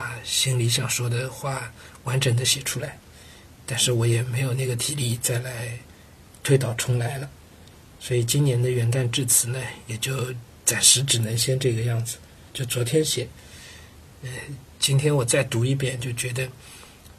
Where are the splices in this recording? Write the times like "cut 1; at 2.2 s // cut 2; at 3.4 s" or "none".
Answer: cut 1; at 12.5 s